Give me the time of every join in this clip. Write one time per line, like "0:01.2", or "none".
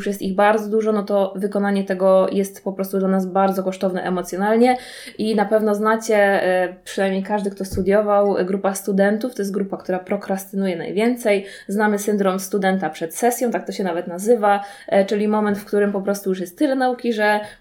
none